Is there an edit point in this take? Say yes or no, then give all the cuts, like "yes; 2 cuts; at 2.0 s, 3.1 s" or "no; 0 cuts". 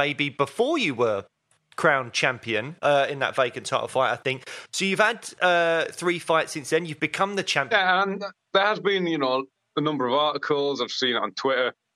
yes; 1 cut; at 7.7 s